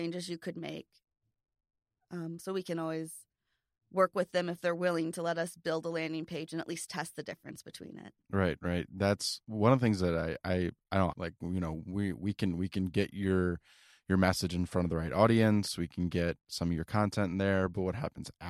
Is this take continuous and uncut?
no; 3 cuts; at 2.0 s, 8.2 s, 11.1 s

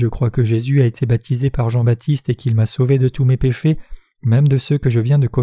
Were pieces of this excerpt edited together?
no; 0 cuts

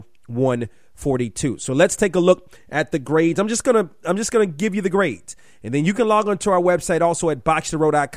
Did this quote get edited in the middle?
no; 0 cuts

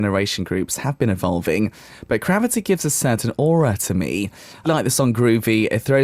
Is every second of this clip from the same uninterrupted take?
no; 1 cut; at 4.6 s

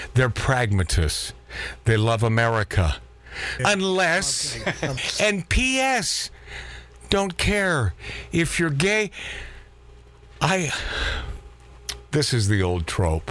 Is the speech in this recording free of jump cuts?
no; 2 cuts; at 3.6 s, 5.0 s

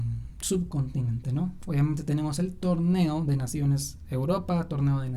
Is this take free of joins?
yes; 0 cuts

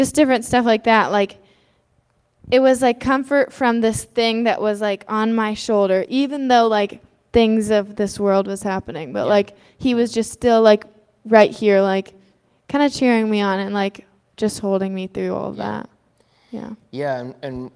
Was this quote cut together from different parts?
no; 0 cuts

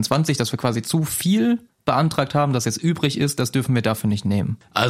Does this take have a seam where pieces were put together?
no; 0 cuts

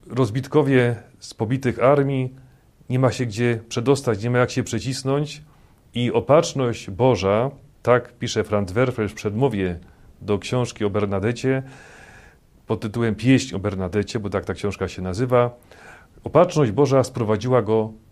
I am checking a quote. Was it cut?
no; 0 cuts

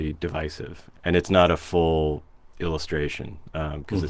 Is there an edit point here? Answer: yes; 1 cut; at 0.9 s

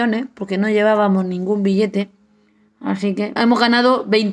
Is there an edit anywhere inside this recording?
yes; 1 cut; at 3.4 s

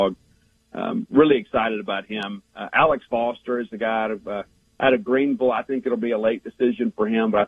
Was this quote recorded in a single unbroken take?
yes; 0 cuts

